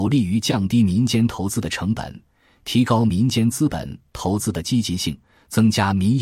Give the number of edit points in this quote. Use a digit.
0